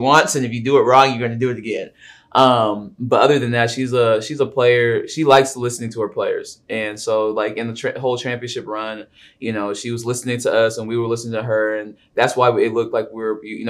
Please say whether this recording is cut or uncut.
uncut